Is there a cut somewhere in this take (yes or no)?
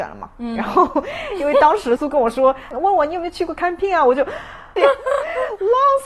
yes